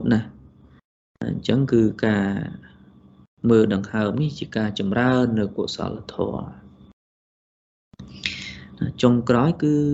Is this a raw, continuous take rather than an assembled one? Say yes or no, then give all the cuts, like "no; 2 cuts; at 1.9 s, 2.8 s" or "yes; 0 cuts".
yes; 0 cuts